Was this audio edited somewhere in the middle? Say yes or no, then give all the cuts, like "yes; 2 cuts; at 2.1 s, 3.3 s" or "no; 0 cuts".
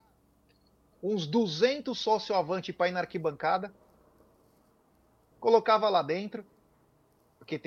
yes; 1 cut; at 5.3 s